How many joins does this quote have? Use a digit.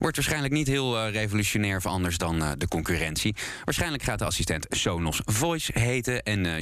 0